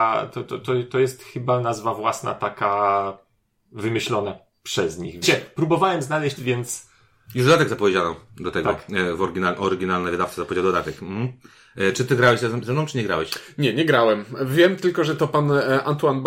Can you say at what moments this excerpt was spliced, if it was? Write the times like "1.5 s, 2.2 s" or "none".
5.2 s, 6.4 s